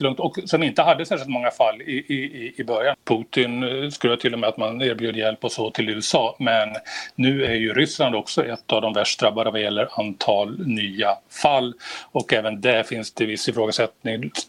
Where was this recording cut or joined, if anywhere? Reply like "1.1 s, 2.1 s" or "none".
2.9 s